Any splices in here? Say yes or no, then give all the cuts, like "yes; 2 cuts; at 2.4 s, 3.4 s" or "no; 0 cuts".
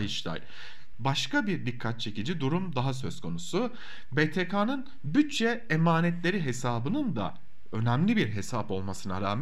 yes; 1 cut; at 0.9 s